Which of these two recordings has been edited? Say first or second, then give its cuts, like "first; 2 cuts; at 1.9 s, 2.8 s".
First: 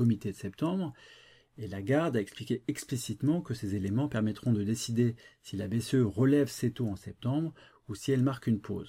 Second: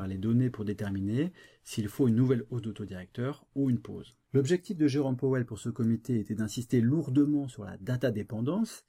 second; 1 cut; at 4.2 s